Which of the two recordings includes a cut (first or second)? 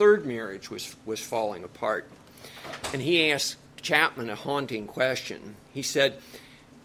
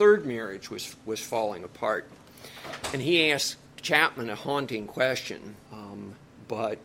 second